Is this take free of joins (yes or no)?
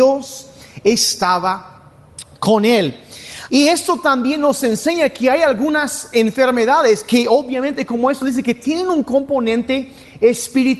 no